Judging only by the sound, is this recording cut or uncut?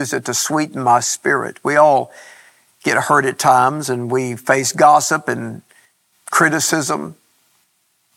uncut